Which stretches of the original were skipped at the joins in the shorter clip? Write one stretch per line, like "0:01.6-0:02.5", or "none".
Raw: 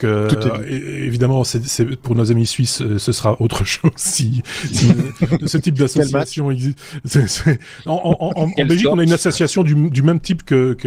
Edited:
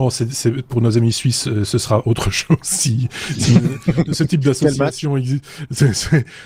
none